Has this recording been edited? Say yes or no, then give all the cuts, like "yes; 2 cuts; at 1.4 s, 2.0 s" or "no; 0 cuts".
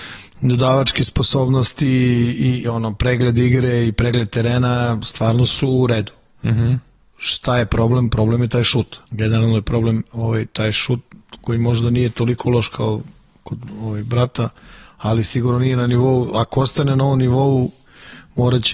yes; 2 cuts; at 2.6 s, 9.0 s